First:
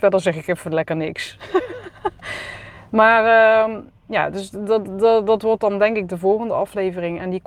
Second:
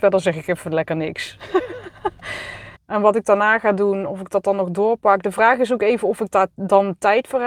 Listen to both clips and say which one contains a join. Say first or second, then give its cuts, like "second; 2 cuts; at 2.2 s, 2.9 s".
second; 1 cut; at 2.7 s